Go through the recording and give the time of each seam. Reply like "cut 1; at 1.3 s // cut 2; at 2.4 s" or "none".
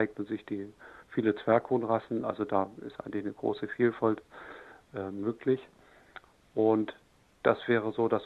none